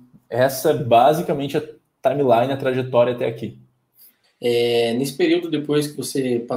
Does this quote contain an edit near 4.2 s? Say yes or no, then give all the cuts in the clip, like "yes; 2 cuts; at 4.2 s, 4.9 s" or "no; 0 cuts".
yes; 1 cut; at 4.2 s